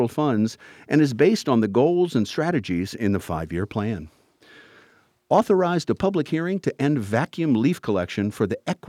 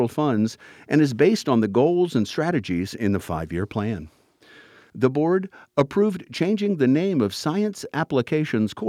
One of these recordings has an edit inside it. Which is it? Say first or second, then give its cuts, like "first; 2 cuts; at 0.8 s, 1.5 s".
second; 1 cut; at 4.9 s